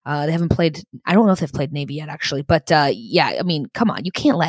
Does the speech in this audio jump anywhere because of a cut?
no; 0 cuts

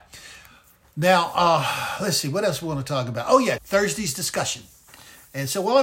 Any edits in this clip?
yes; 1 cut; at 3.6 s

